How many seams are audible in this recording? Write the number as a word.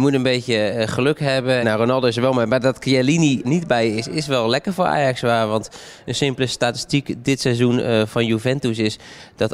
two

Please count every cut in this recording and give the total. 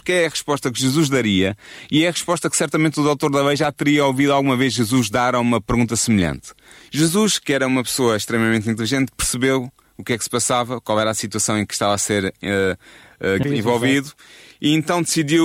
two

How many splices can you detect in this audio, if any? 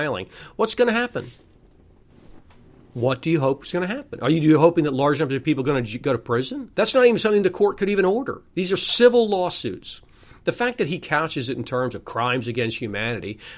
one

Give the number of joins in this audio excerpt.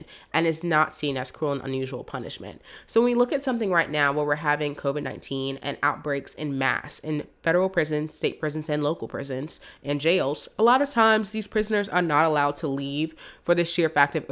zero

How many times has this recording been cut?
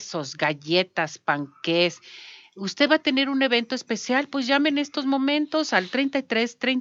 zero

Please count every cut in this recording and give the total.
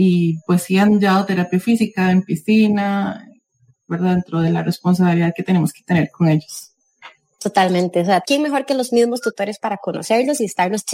two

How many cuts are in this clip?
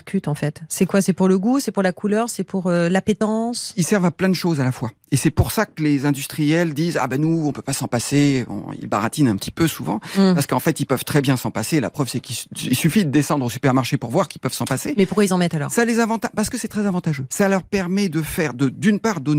one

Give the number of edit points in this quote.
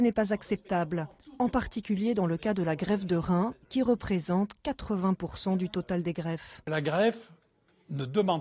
zero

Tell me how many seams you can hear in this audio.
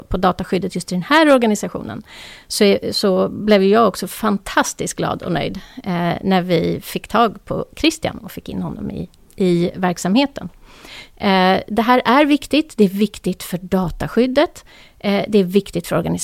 zero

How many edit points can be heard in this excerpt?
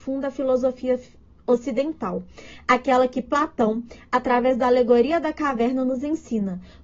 zero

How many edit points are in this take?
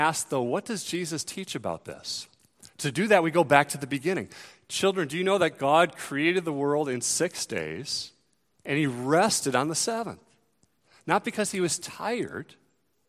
zero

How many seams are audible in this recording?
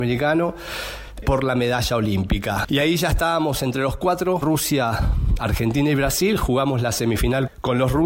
two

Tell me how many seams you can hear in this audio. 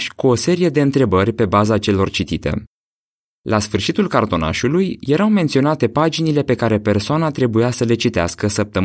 zero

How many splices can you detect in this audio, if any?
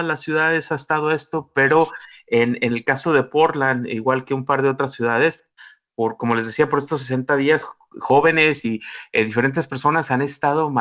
zero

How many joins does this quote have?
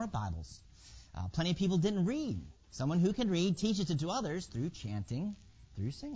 one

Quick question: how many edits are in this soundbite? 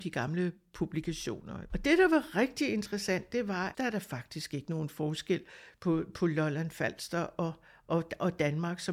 two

